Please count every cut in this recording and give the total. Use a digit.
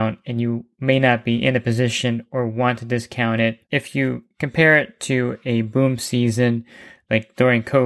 1